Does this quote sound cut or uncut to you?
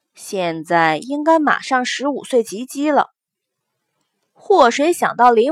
uncut